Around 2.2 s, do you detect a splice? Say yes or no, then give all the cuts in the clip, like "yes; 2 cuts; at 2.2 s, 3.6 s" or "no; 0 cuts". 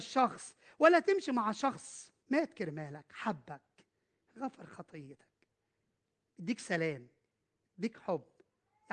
yes; 1 cut; at 2.2 s